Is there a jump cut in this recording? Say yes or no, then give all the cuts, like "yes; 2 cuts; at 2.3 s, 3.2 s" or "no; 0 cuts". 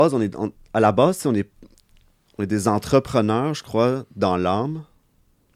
no; 0 cuts